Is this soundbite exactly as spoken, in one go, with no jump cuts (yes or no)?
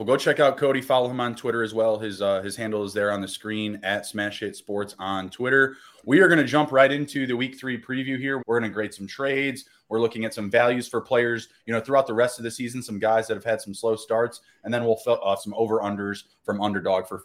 no